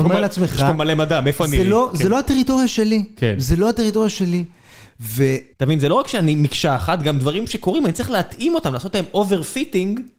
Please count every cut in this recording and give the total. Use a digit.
1